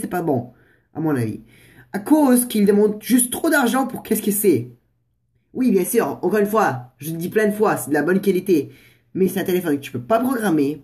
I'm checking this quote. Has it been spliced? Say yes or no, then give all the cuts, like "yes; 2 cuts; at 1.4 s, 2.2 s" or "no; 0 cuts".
no; 0 cuts